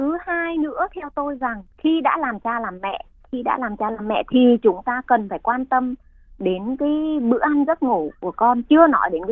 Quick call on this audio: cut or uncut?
cut